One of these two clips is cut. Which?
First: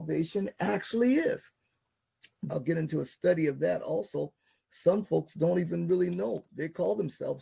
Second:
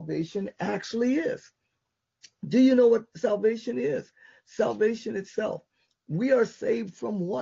first; 1 cut; at 2.5 s

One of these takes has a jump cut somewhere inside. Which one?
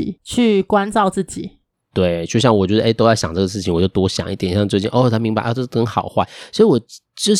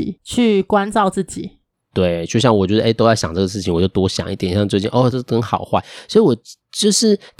second; 1 cut; at 5.1 s

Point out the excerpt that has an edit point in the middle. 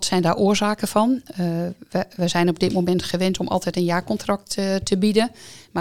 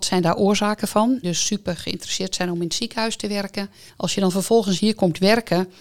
second; 2 cuts; at 1.2 s, 3.9 s

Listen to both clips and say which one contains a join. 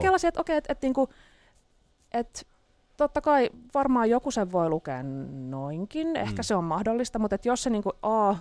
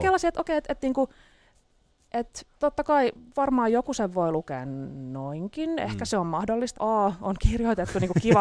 second; 2 cuts; at 2.5 s, 6.7 s

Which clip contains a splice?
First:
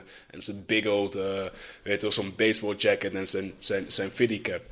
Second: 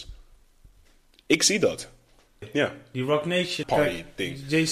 second; 2 cuts; at 2.4 s, 3.6 s

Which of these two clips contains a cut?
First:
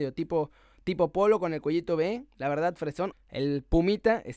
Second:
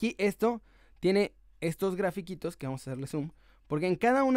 first; 1 cut; at 3.1 s

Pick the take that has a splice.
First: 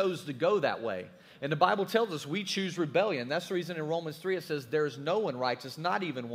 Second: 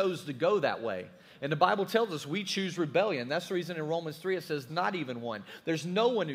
second; 1 cut; at 4.7 s

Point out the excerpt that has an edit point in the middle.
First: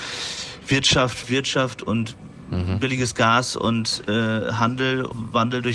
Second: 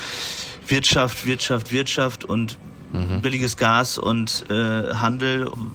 first; 1 cut; at 1.2 s

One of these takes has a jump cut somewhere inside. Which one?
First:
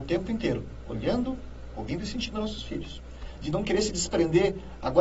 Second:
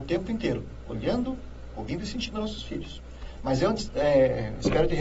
first; 1 cut; at 3.4 s

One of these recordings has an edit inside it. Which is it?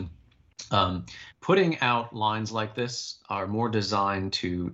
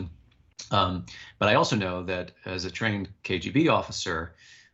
first; 1 cut; at 1.3 s

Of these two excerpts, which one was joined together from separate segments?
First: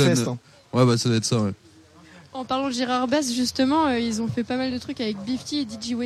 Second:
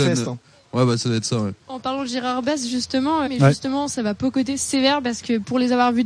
second; 2 cuts; at 1.6 s, 3.3 s

